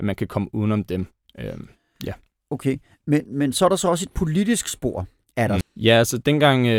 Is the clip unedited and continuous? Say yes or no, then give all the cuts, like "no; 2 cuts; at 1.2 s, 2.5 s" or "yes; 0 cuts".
no; 1 cut; at 5.6 s